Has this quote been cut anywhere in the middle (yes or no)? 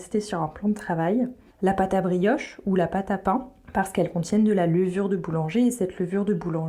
no